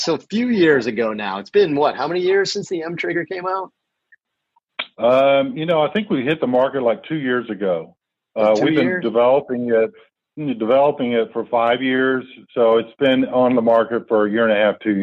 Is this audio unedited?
yes; 0 cuts

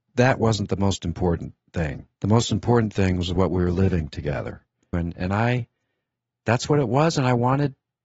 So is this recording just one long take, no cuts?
no; 2 cuts; at 2.1 s, 4.9 s

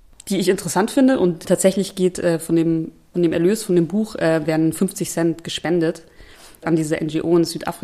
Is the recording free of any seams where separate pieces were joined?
yes; 0 cuts

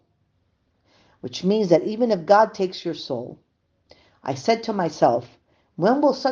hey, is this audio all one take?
yes; 0 cuts

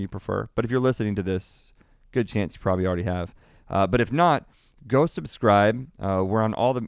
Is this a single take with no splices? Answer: yes; 0 cuts

